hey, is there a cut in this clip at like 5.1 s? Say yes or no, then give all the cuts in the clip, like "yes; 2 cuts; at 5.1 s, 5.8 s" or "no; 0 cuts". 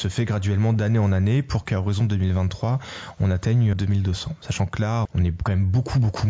yes; 2 cuts; at 3.7 s, 5.1 s